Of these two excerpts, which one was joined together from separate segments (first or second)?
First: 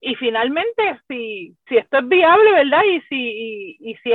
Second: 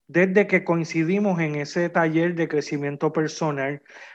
first